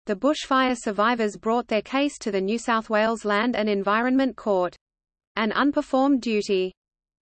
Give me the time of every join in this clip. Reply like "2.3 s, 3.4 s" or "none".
none